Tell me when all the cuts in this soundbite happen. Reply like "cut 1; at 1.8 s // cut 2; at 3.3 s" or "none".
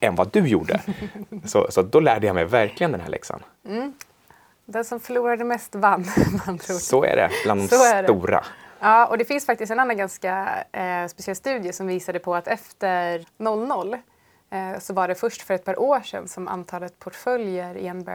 cut 1; at 13.2 s